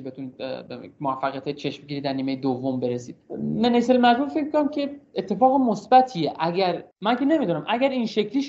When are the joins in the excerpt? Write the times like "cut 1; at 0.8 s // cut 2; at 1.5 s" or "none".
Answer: cut 1; at 3.2 s // cut 2; at 6.9 s